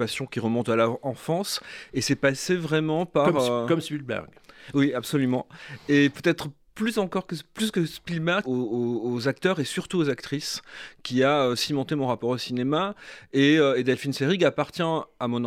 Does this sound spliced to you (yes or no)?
yes